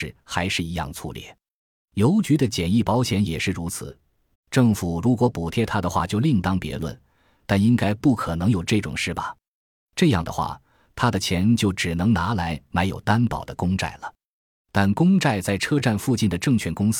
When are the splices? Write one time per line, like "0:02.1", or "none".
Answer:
0:04.3